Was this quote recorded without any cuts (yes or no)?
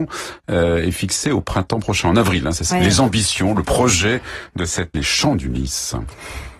no